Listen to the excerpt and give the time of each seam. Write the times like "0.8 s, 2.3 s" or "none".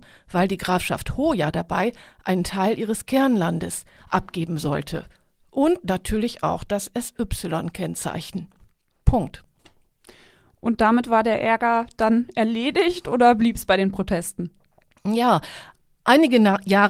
9.0 s